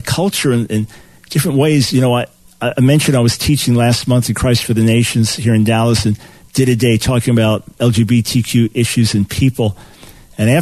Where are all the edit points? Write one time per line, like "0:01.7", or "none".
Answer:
0:07.7